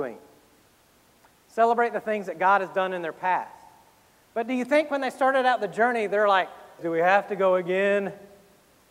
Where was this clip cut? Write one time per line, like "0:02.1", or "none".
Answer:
0:06.8